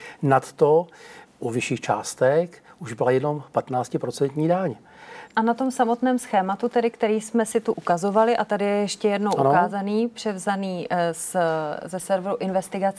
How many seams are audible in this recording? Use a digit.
2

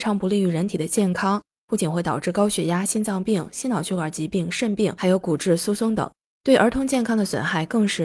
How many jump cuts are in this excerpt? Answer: 0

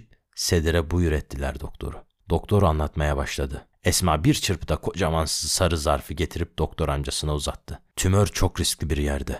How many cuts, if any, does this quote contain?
2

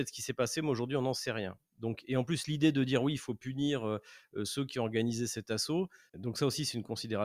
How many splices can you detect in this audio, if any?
0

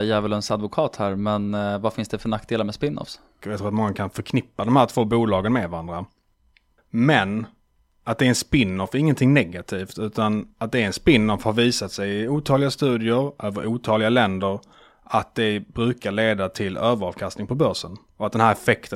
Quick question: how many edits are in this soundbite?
1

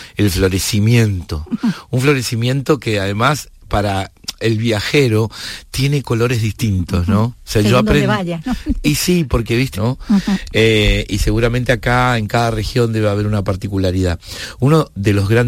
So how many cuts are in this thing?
1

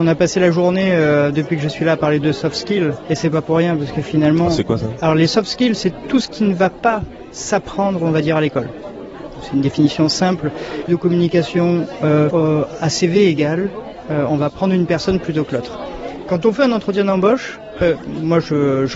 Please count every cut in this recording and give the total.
2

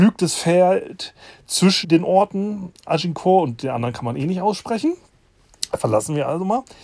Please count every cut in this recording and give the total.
1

